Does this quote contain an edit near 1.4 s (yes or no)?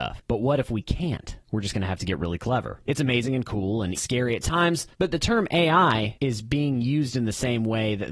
no